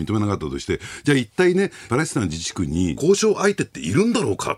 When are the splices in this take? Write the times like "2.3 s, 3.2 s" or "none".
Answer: 1.9 s, 3.0 s